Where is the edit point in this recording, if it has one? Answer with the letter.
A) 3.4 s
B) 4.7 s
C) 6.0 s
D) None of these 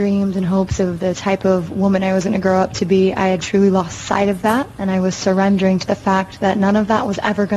A